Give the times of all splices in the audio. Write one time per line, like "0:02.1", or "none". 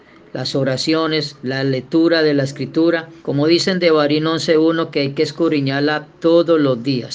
0:03.2

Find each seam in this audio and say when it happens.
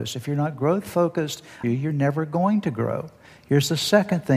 0:01.6

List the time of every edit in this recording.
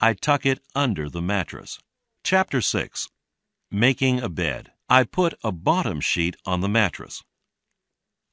0:02.2
0:04.8

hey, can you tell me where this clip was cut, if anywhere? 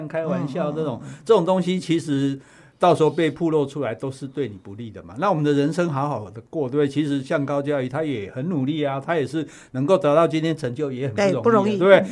none

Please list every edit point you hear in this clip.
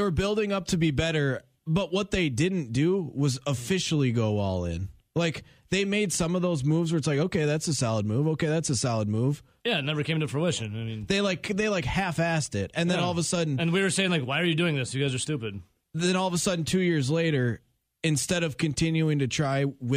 0:09.6

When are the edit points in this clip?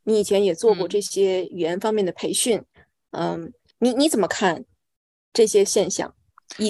none

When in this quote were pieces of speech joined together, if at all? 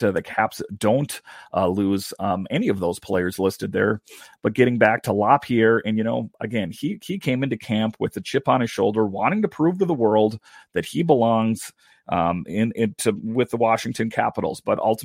none

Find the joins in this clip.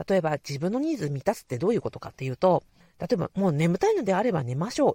0:02.8

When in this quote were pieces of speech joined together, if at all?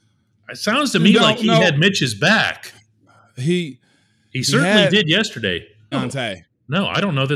0:05.9

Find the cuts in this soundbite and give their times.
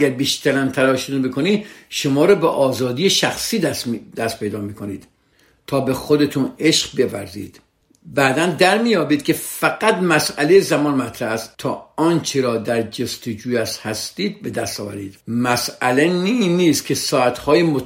0:11.5
0:15.2

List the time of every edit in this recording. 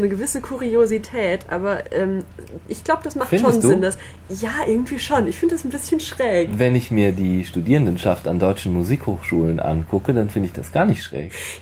none

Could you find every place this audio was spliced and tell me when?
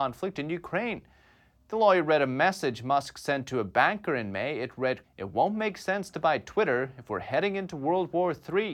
0:05.0

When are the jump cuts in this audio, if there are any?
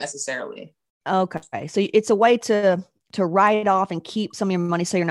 none

